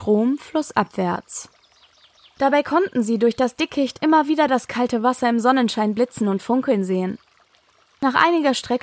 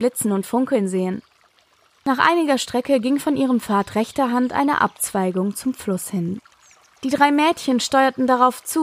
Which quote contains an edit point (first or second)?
second